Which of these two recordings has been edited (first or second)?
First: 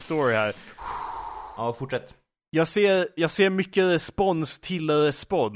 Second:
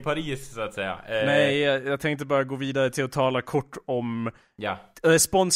first